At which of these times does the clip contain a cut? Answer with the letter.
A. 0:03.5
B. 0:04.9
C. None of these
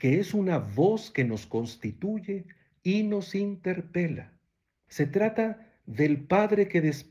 B